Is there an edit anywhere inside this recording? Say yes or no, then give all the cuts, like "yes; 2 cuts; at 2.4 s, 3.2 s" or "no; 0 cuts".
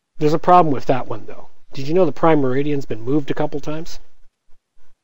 no; 0 cuts